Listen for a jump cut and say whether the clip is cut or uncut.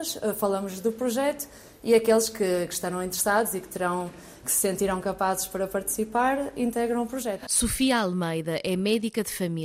uncut